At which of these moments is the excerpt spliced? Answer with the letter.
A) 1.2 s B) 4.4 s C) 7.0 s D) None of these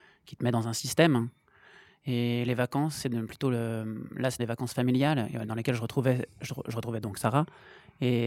B